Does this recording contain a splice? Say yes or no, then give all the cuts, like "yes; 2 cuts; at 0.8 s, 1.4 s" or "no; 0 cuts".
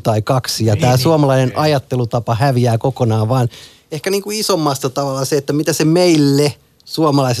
no; 0 cuts